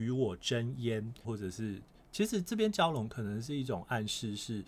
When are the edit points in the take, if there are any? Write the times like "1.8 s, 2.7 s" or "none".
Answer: 1.2 s

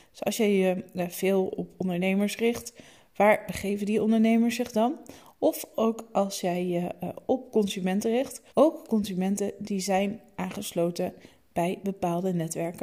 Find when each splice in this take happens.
8.5 s

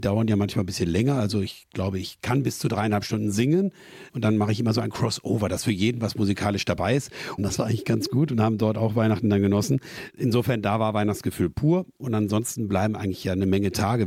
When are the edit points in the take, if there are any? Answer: 4.1 s, 7.4 s

